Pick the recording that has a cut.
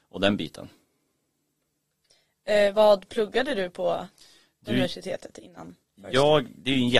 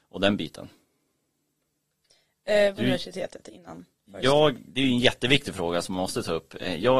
second; 1 cut; at 2.7 s

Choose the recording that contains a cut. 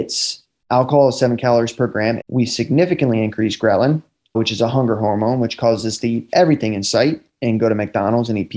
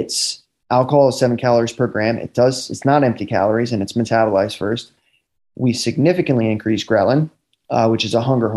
first; 2 cuts; at 2.2 s, 4.3 s

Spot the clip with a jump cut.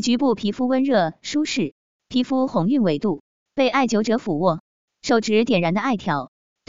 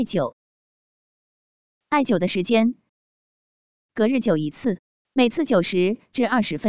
first; 2 cuts; at 3.4 s, 4.9 s

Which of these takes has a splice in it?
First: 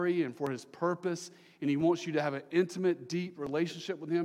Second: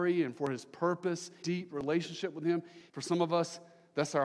second; 2 cuts; at 1.4 s, 2.9 s

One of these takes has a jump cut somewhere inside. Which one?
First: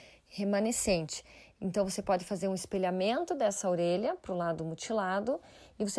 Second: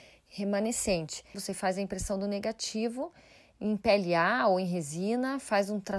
second; 1 cut; at 1.3 s

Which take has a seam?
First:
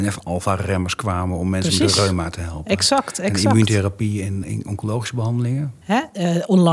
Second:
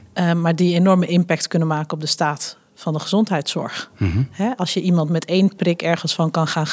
first; 2 cuts; at 4.4 s, 5.8 s

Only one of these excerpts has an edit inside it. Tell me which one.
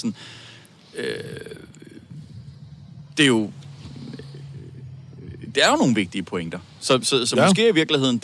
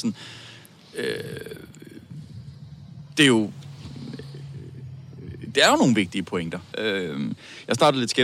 second; 1 cut; at 6.7 s

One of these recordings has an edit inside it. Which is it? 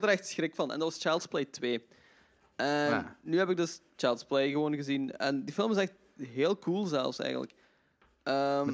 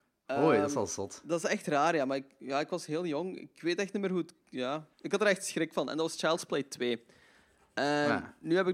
second; 1 cut; at 4.9 s

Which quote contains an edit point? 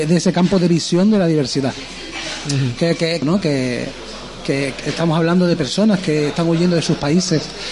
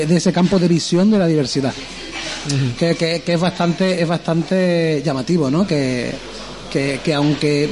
first; 2 cuts; at 3.2 s, 4.8 s

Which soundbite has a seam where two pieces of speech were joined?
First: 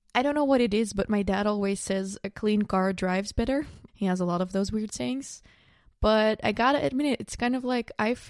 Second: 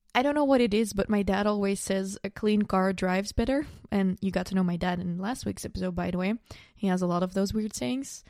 first; 1 cut; at 3.9 s

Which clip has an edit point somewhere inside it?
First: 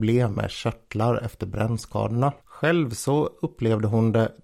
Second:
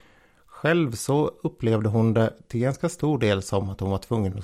first; 1 cut; at 2.4 s

